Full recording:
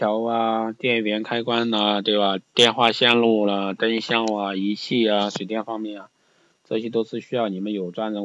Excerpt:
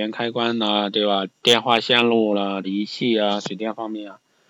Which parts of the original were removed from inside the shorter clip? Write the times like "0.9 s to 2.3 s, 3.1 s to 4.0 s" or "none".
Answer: 3.8 s to 4.5 s